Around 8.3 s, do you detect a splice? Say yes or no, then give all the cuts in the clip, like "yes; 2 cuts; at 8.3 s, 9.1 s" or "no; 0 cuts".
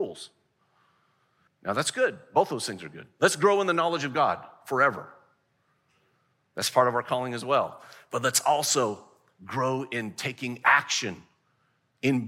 no; 1 cut; at 1.5 s